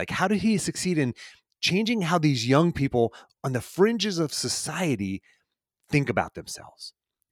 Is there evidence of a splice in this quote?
no; 0 cuts

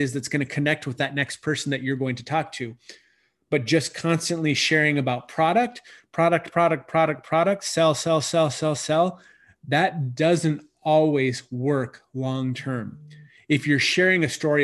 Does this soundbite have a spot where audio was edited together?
no; 0 cuts

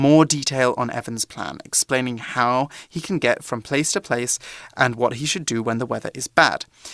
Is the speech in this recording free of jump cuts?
yes; 0 cuts

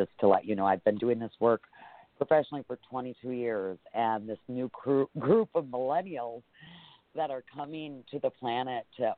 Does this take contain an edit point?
no; 0 cuts

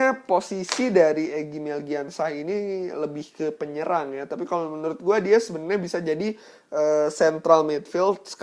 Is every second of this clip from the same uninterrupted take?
yes; 0 cuts

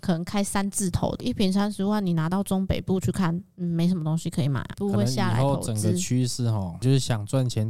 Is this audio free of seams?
yes; 0 cuts

